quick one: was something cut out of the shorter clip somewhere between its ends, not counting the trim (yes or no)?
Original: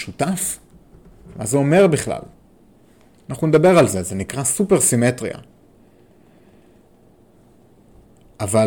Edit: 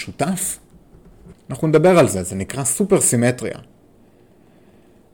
yes